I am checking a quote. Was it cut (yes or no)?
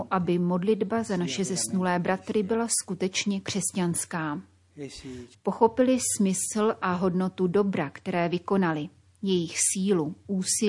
yes